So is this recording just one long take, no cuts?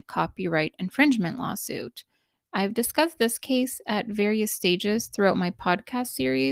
yes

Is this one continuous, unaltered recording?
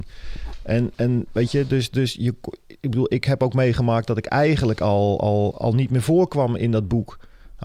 no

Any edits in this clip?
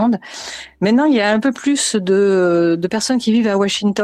no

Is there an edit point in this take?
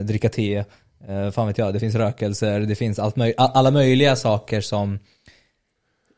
no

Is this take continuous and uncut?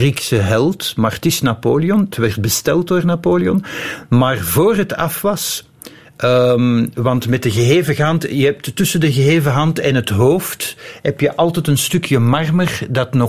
yes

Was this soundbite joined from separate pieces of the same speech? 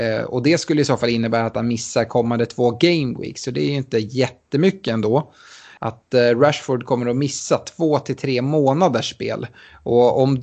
yes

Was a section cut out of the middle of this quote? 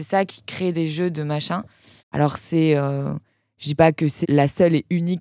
yes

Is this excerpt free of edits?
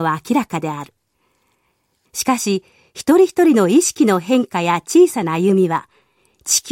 no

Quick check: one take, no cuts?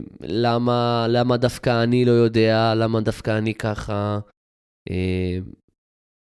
yes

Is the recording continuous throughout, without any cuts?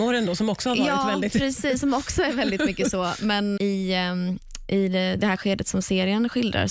no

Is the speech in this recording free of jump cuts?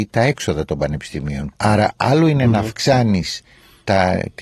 no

